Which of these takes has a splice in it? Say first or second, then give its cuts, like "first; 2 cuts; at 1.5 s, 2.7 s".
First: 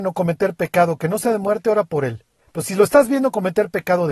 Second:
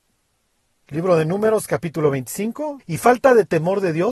second; 1 cut; at 2.8 s